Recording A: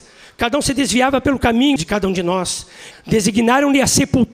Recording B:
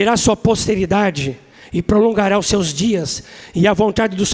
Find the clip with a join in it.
A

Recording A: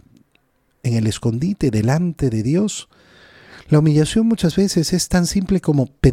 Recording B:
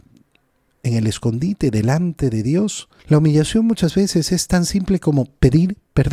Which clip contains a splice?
B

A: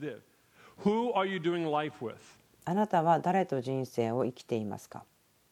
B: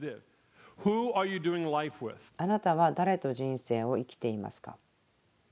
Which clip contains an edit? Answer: B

